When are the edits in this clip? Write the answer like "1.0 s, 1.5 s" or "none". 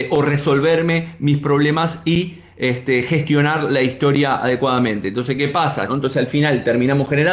5.9 s